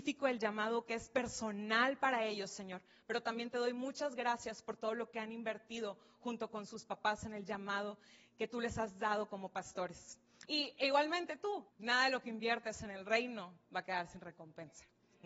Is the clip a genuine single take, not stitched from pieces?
no; 2 cuts; at 10.5 s, 11.7 s

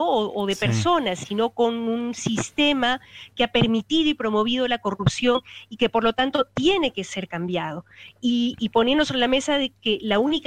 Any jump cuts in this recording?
no; 0 cuts

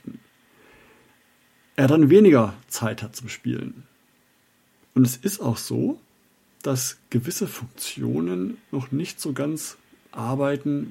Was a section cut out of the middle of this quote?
yes; 1 cut; at 4.8 s

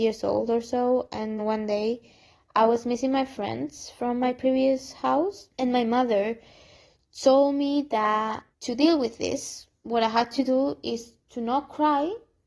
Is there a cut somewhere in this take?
yes; 3 cuts; at 1.4 s, 5.5 s, 8.5 s

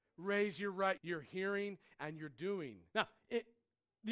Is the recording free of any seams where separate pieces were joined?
no; 2 cuts; at 1.0 s, 2.9 s

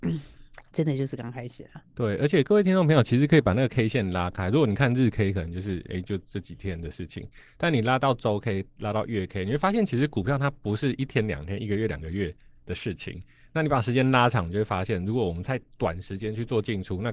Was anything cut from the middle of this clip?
no; 0 cuts

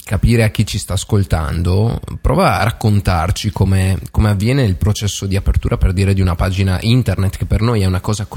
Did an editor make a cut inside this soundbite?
no; 0 cuts

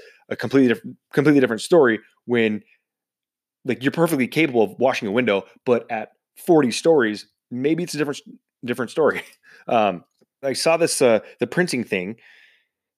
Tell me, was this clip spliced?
yes; 1 cut; at 10.4 s

